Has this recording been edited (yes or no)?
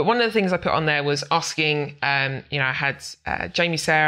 no